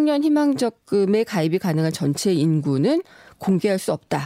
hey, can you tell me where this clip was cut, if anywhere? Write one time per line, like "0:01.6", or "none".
none

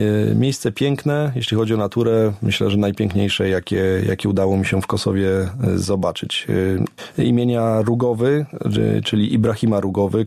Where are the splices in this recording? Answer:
none

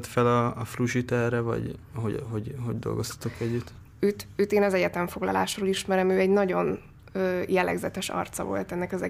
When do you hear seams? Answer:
0:03.9

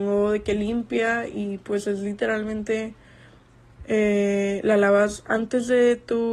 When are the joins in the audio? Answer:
none

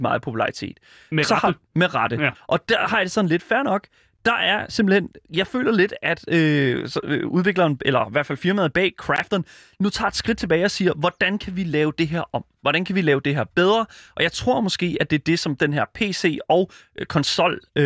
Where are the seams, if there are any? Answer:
0:02.3

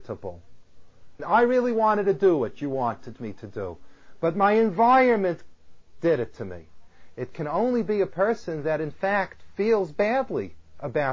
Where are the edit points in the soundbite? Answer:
0:01.2

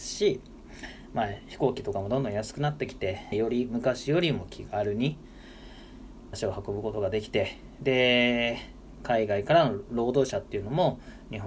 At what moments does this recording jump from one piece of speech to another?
0:03.3
0:06.3

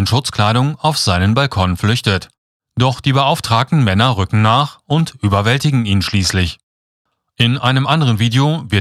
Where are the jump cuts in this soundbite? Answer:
none

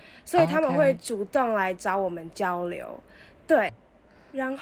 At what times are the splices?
0:03.7

